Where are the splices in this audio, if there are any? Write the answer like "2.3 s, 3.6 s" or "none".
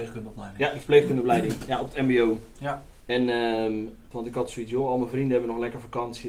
3.0 s, 4.1 s